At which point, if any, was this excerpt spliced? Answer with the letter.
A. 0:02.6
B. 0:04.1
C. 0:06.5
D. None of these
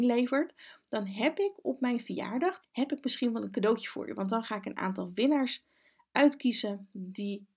A